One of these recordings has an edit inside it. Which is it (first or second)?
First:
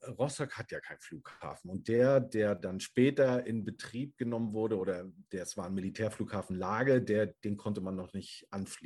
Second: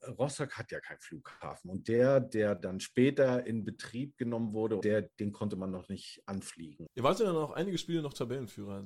second